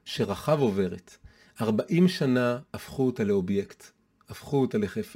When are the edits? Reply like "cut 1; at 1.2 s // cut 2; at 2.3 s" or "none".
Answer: none